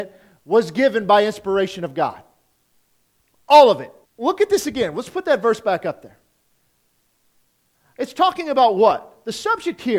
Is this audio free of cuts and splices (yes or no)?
no